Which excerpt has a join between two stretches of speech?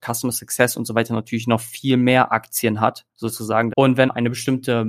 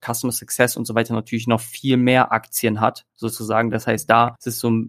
first; 1 cut; at 3.7 s

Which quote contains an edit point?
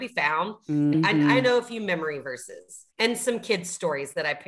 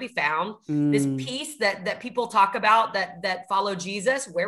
first; 2 cuts; at 0.9 s, 2.9 s

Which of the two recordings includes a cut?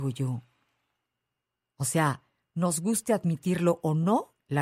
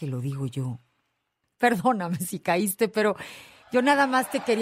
second; 1 cut; at 1.4 s

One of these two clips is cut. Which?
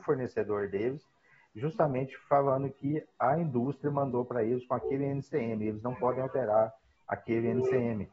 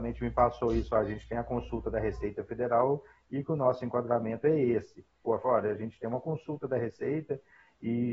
second; 1 cut; at 5.3 s

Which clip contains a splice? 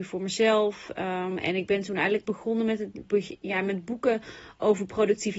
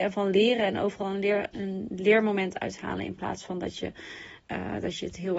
second; 1 cut; at 1.5 s

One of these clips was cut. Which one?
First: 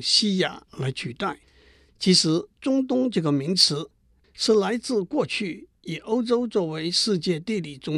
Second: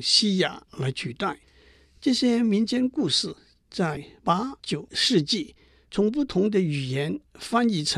first; 2 cuts; at 1.9 s, 4.2 s

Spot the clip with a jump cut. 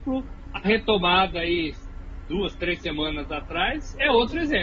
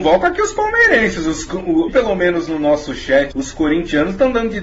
second; 2 cuts; at 1.9 s, 3.3 s

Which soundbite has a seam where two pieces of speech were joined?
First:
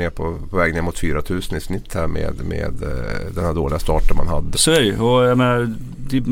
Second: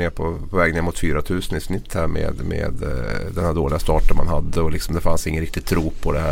first; 1 cut; at 4.5 s

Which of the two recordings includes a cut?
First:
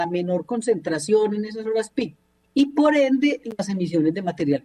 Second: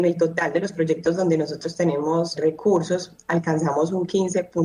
second; 1 cut; at 2.4 s

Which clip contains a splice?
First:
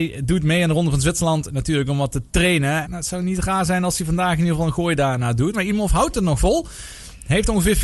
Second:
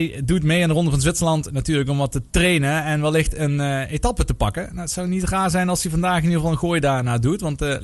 first; 2 cuts; at 2.8 s, 5.5 s

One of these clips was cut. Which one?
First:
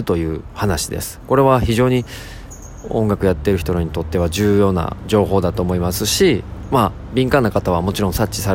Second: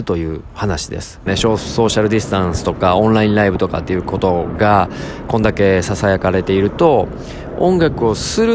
second; 1 cut; at 1.3 s

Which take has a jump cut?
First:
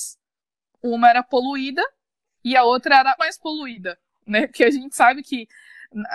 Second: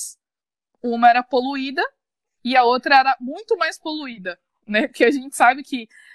first; 1 cut; at 3.2 s

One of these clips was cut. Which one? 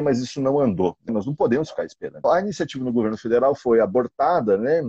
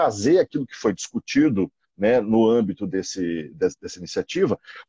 first; 2 cuts; at 1.1 s, 2.2 s

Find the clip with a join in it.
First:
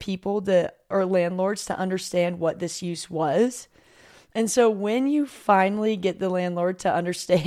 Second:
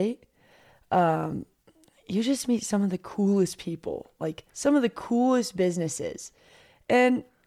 second; 1 cut; at 4.5 s

